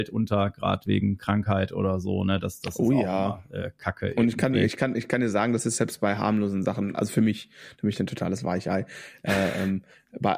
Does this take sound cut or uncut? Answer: uncut